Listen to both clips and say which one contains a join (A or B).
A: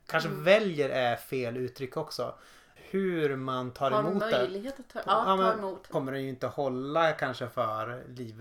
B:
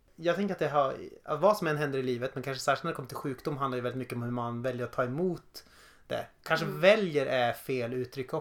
A